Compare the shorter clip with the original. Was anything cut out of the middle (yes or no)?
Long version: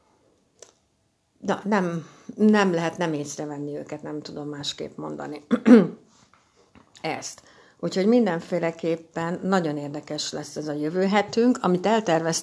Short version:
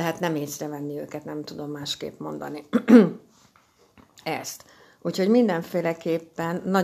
no